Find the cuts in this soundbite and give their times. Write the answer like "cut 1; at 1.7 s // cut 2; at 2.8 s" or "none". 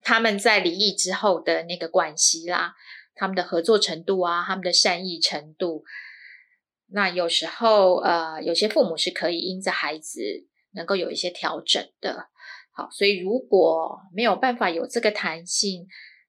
none